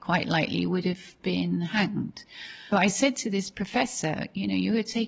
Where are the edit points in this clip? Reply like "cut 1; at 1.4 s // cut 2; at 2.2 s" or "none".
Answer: cut 1; at 2.7 s